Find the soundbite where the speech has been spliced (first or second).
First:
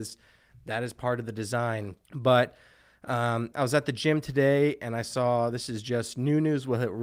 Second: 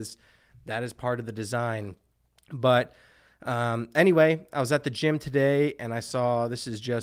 first